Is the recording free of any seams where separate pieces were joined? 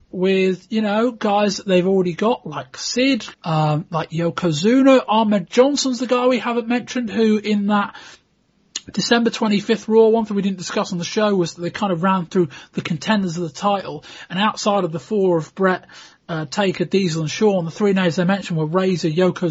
no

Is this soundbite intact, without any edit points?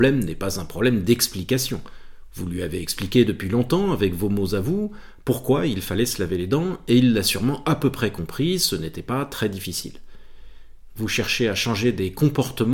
no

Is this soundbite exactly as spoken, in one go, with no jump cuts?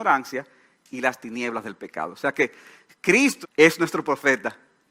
no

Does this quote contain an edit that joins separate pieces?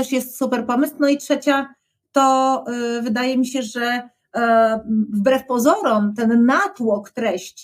no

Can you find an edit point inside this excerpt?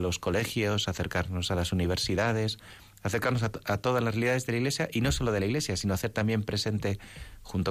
no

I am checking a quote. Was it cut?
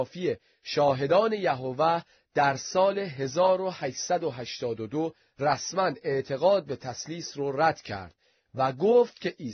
no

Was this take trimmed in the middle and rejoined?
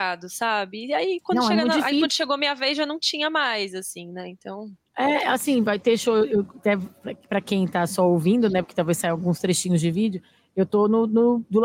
no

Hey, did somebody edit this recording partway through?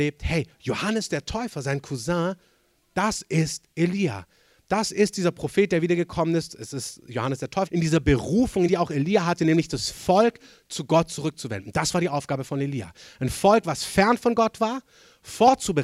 yes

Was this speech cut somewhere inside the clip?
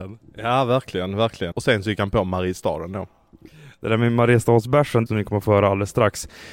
yes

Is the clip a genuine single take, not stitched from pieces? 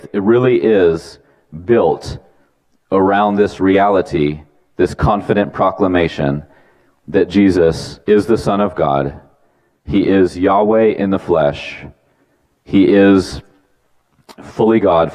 no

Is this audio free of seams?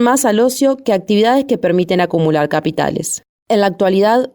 no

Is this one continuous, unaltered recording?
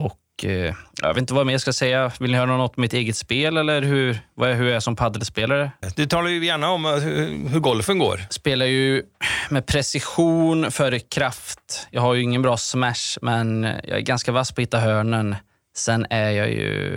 no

